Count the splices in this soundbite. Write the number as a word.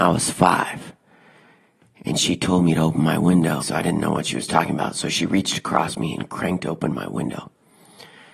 one